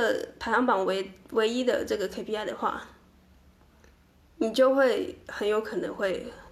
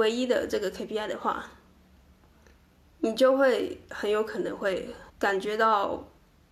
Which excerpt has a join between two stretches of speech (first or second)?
second